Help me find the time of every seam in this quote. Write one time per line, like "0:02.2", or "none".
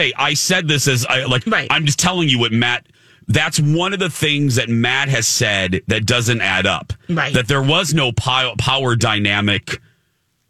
0:01.4

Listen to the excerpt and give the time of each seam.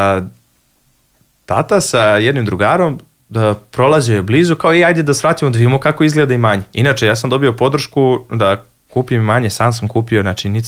none

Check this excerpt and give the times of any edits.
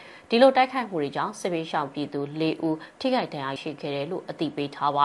0:03.6

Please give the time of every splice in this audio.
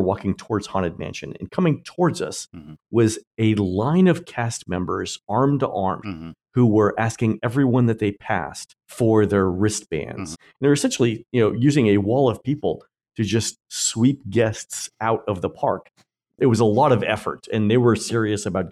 0:06.0
0:08.8
0:10.3

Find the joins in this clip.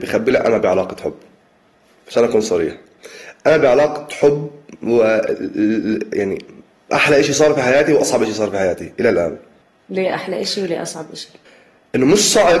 none

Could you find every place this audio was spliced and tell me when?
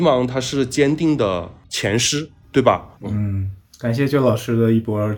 0:03.0

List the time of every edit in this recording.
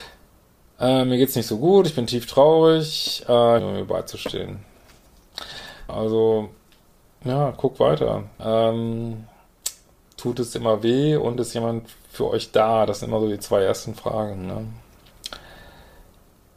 0:03.6
0:05.9
0:08.4

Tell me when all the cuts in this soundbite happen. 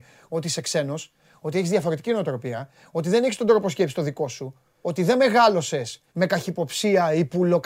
0:04.8
0:06.1

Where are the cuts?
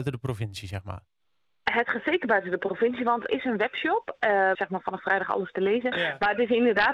0:03.3
0:04.5
0:05.9

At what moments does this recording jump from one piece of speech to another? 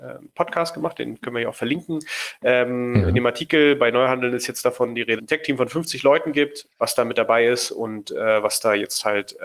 0:05.2
0:06.7

